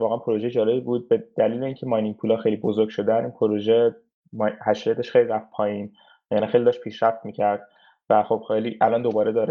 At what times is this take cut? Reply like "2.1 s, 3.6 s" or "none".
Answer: none